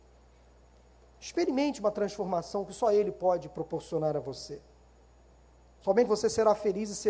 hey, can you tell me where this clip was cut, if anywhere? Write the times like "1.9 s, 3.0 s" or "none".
6.1 s